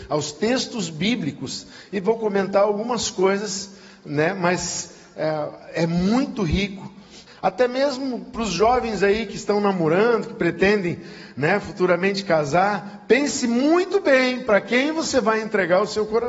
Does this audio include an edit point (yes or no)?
yes